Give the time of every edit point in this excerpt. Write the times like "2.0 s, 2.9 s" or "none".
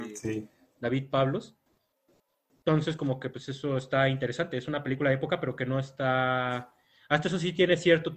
none